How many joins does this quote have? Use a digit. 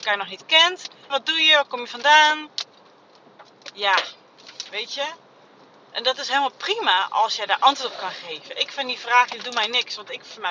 1